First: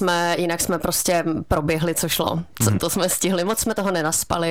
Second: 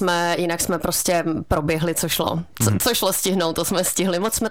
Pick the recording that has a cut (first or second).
first